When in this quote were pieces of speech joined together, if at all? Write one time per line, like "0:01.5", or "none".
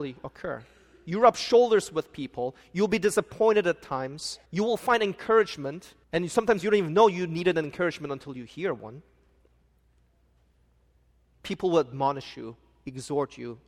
0:04.5
0:06.0